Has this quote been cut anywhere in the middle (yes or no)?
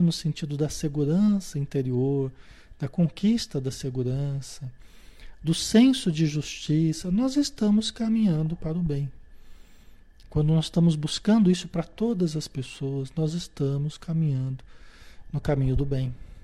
no